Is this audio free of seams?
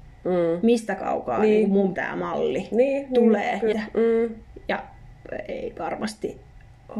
no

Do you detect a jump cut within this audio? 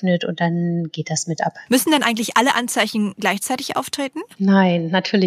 yes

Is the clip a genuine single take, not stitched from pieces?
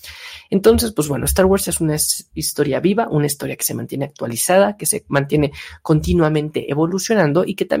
yes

